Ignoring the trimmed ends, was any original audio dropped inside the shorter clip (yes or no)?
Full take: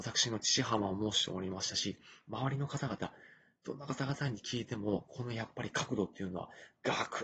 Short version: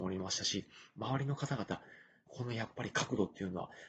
yes